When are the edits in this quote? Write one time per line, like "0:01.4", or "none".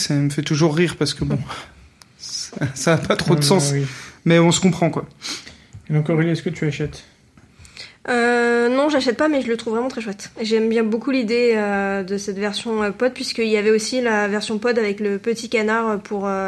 none